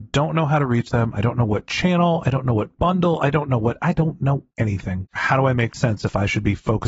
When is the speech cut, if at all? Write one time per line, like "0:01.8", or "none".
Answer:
0:05.2

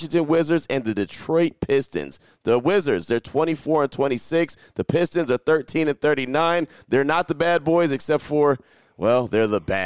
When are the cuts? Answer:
none

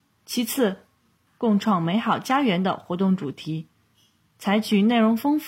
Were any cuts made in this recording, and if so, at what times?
0:01.3

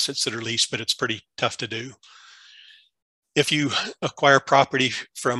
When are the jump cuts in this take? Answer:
none

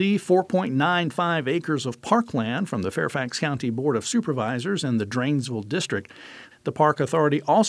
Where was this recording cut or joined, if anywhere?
0:06.5

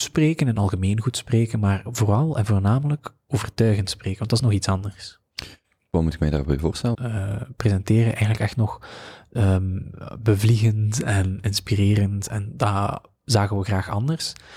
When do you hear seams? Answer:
0:06.9

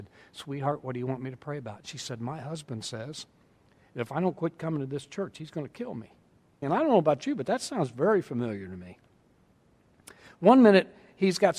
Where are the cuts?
0:06.6

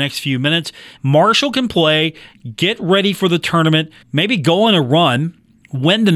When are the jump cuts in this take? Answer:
0:01.0
0:04.0

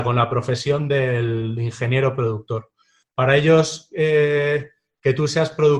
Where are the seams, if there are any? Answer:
0:03.0

